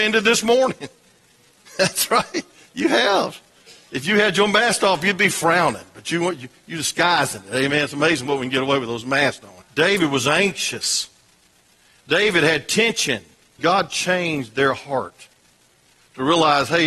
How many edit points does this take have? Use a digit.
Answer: 2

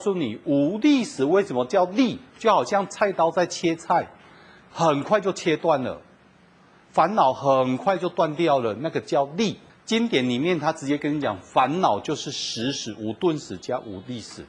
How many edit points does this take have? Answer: 1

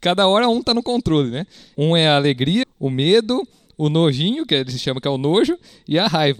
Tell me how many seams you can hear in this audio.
1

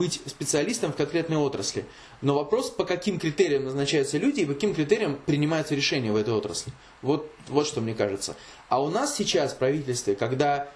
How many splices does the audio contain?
0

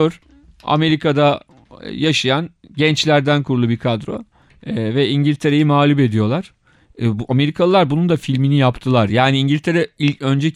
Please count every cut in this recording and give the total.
1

